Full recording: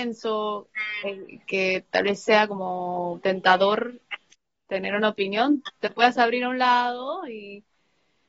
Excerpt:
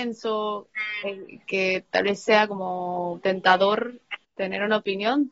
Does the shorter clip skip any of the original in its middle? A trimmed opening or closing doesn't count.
yes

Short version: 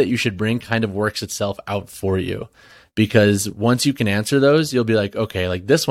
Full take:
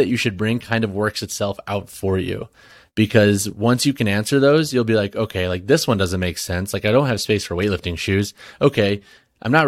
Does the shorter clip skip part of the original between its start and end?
no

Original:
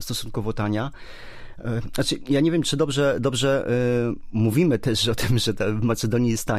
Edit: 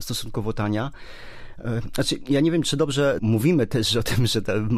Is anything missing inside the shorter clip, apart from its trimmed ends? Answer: yes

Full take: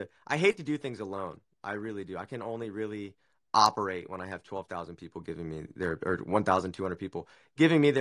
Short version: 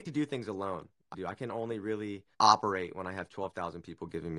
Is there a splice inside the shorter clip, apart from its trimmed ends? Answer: yes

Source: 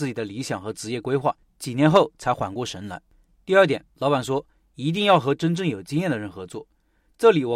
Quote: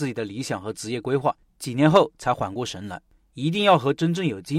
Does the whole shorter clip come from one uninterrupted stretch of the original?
no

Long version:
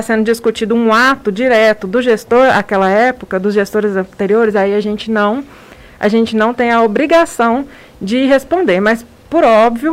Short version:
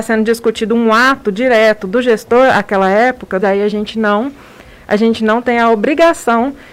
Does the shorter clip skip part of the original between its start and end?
yes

